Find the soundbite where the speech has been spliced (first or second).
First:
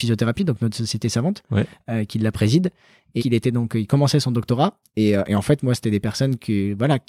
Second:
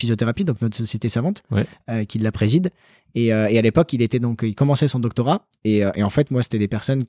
first